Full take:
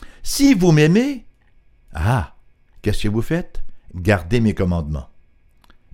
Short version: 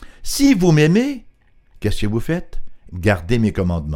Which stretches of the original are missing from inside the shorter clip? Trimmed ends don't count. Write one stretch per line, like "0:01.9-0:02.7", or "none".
0:01.6-0:02.7